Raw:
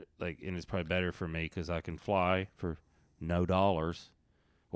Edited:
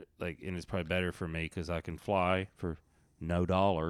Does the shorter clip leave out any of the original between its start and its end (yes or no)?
no